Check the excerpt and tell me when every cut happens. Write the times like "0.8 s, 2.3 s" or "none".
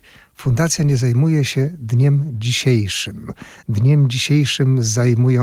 none